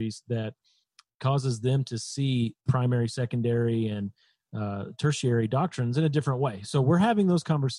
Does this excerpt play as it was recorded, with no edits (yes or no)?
no